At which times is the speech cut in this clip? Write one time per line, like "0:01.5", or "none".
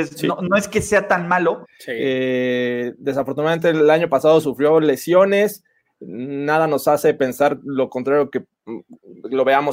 0:01.6